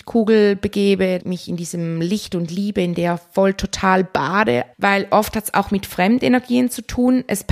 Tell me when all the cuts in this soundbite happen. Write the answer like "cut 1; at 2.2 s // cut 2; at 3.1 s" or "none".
cut 1; at 1.2 s // cut 2; at 4.7 s